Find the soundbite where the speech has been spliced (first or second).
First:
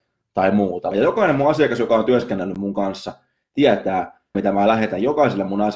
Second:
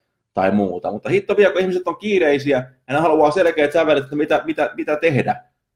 first